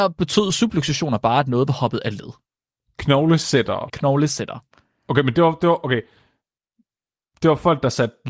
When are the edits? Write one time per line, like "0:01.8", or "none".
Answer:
0:03.9